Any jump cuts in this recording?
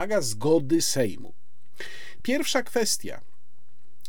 yes; 1 cut; at 2.2 s

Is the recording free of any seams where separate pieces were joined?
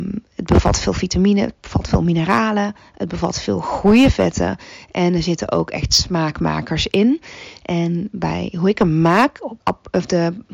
no; 1 cut; at 9.6 s

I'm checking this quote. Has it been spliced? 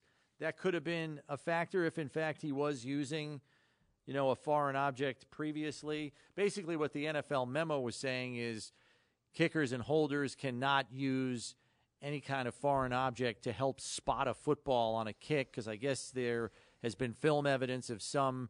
no; 0 cuts

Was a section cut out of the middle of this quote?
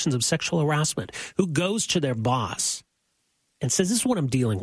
no; 0 cuts

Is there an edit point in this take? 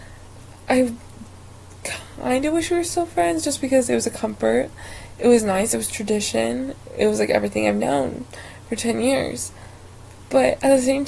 no; 0 cuts

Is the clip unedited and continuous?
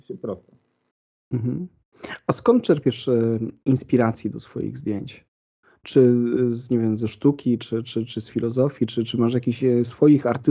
yes; 0 cuts

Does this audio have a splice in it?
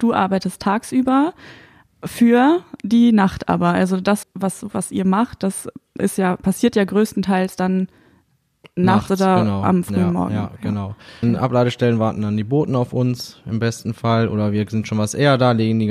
yes; 2 cuts; at 4.2 s, 11.2 s

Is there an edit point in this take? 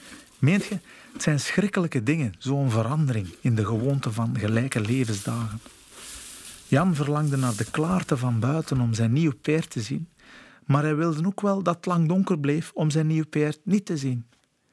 no; 0 cuts

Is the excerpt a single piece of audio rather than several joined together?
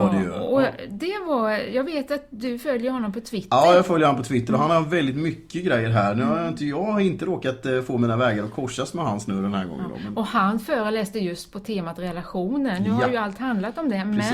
yes; 0 cuts

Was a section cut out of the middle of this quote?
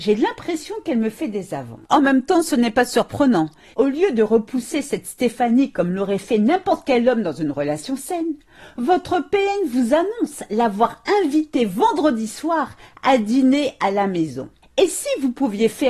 yes; 1 cut; at 3.7 s

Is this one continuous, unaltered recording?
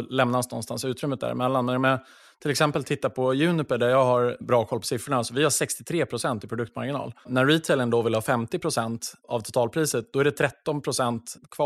yes; 0 cuts

